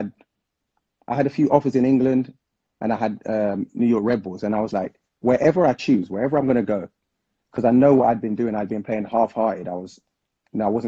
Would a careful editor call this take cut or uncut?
cut